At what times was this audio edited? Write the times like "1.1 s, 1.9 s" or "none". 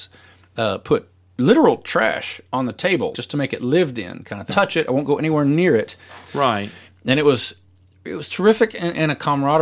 3.1 s, 4.5 s, 6.2 s